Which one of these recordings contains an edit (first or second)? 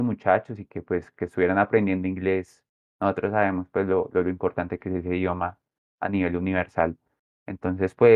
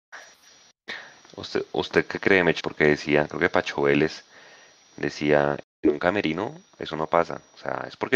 second